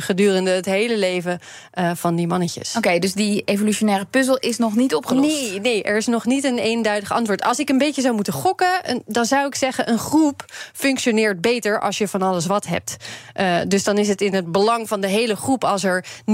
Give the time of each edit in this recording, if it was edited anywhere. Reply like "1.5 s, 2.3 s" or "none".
none